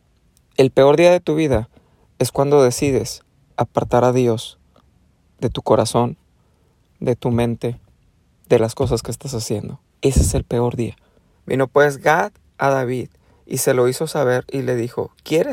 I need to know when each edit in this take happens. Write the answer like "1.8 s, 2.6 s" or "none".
9.9 s, 11.4 s